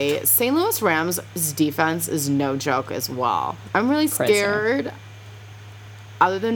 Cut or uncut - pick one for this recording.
cut